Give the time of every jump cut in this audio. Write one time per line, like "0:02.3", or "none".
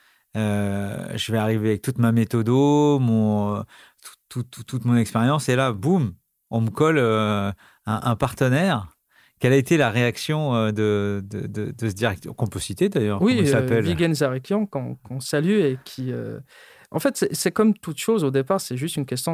none